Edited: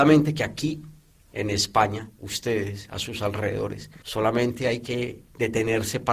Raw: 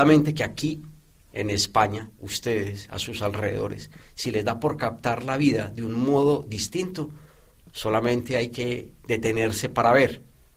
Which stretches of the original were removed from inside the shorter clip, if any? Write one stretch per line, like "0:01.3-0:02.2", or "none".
0:04.0-0:07.7